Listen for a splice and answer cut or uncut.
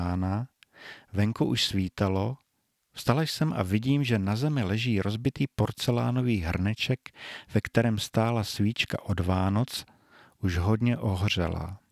uncut